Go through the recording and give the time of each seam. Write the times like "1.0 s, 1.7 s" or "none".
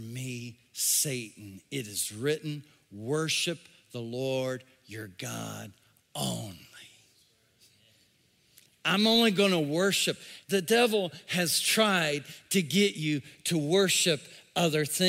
10.4 s